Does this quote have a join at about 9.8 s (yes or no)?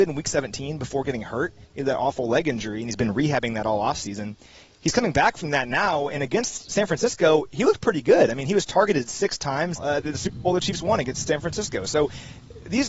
yes